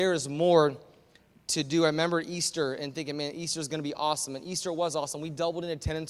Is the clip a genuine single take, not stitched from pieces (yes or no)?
yes